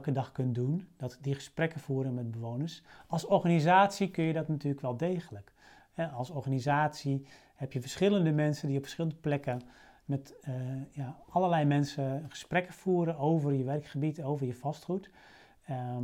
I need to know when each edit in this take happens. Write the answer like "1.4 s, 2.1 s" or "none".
none

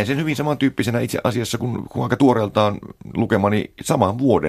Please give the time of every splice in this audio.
none

